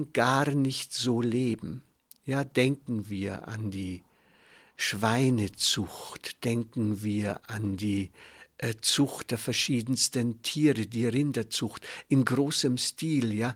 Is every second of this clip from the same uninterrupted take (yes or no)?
yes